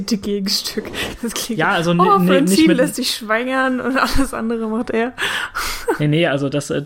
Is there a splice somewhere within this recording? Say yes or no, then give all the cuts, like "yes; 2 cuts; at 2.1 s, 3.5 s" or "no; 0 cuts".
no; 0 cuts